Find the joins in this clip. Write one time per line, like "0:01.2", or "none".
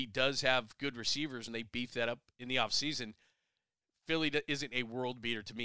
0:01.5